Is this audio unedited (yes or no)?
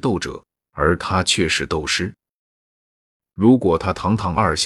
yes